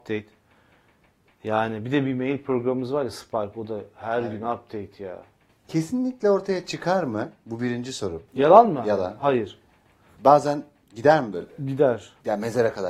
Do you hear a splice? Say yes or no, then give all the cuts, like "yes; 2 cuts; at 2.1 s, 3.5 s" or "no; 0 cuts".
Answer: no; 0 cuts